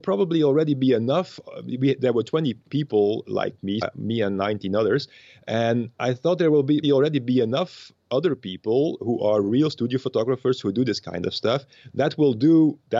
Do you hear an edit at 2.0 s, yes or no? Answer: no